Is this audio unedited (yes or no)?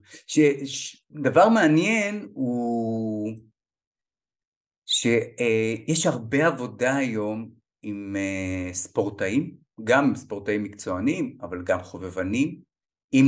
yes